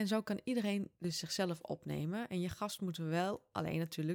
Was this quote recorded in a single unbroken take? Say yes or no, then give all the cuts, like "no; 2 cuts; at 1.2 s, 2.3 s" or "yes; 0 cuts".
yes; 0 cuts